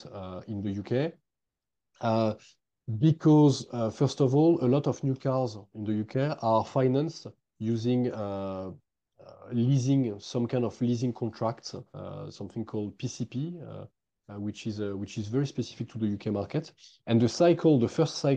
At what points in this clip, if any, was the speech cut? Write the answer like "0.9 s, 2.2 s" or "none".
none